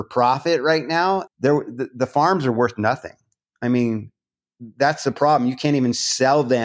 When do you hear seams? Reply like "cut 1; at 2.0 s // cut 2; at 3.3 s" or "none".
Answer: cut 1; at 1.3 s